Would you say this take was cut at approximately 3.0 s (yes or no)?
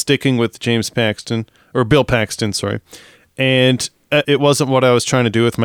no